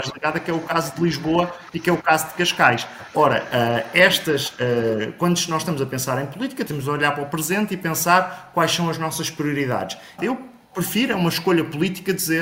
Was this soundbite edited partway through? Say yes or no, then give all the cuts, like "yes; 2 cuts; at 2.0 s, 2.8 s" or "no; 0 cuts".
yes; 2 cuts; at 6.7 s, 10.2 s